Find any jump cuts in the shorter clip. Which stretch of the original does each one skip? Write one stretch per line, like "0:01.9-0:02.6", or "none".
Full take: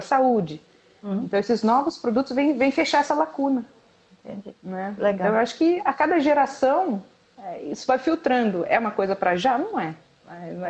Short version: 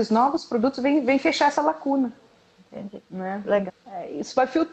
0:05.2-0:07.2